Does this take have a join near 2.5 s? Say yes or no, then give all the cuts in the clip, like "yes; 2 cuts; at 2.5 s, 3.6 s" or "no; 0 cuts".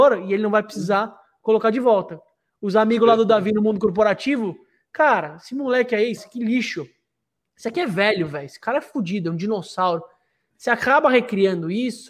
no; 1 cut; at 6.2 s